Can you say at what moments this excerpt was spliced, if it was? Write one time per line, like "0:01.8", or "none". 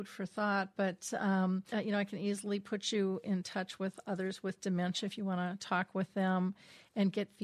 0:01.7